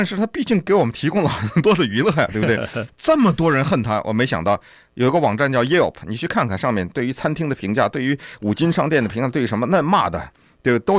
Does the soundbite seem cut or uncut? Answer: uncut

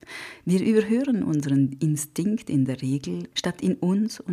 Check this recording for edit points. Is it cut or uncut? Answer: cut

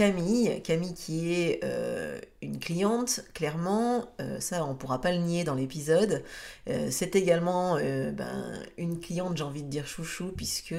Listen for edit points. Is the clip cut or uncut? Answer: uncut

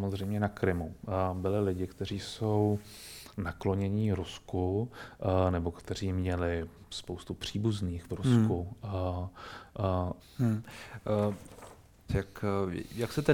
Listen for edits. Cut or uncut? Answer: cut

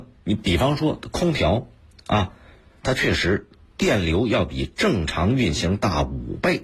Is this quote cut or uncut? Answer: cut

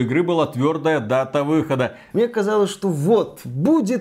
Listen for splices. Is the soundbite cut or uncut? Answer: cut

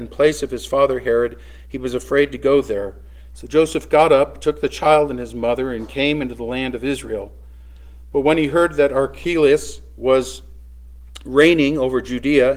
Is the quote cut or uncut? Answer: cut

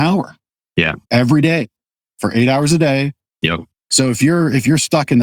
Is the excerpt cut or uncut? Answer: cut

